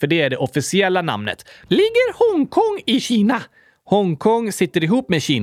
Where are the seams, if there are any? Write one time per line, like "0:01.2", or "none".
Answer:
0:01.7